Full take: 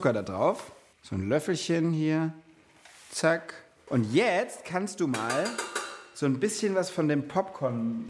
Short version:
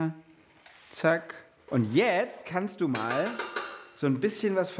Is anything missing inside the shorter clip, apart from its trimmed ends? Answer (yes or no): no